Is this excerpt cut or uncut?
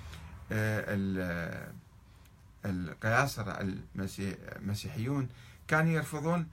uncut